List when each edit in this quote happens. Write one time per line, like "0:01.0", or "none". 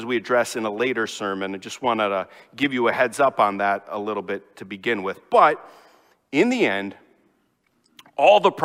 none